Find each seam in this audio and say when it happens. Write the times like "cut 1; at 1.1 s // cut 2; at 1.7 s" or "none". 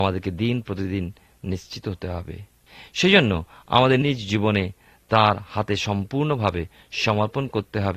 cut 1; at 4.0 s